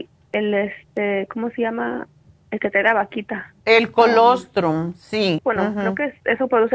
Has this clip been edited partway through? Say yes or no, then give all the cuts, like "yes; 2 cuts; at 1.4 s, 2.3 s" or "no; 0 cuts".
yes; 2 cuts; at 3.6 s, 5.4 s